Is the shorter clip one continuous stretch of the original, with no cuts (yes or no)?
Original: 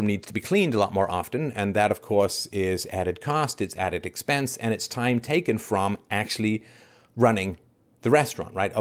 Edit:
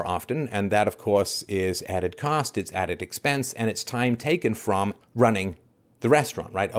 no